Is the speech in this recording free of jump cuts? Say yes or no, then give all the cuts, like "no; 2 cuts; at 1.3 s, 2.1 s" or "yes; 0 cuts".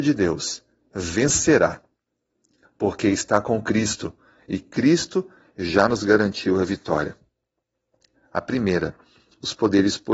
no; 1 cut; at 8.1 s